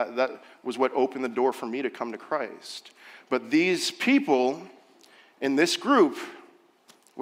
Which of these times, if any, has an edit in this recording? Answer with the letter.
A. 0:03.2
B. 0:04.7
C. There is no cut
C